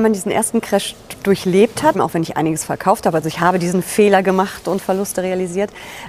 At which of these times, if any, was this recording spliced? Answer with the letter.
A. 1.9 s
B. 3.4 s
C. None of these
A